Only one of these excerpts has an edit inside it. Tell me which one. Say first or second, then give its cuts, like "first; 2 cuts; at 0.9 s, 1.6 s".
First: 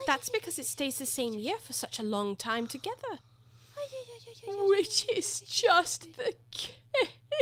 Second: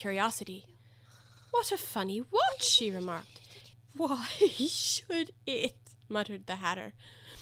second; 1 cut; at 3.7 s